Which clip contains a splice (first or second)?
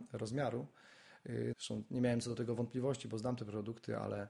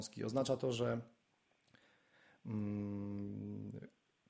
first